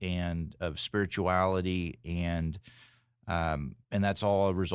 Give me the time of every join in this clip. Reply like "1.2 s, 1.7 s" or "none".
3.8 s

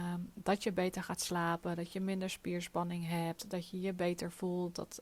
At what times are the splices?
none

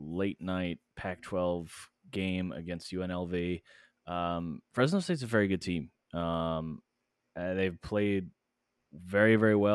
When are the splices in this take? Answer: none

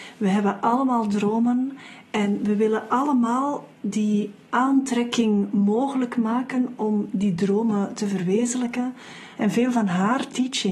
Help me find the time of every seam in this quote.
9.4 s

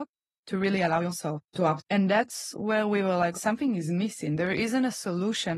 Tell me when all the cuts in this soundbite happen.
1.8 s, 3.3 s

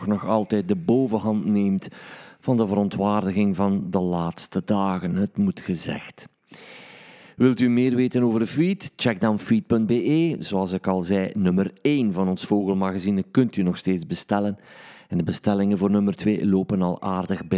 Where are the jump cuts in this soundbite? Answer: none

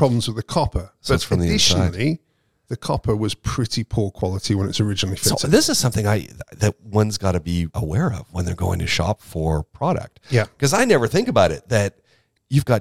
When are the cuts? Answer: 7.7 s

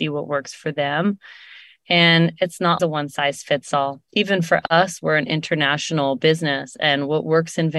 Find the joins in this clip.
2.8 s

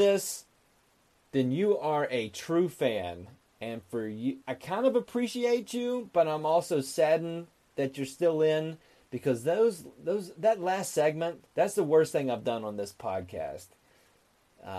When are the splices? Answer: 4.4 s, 11.5 s

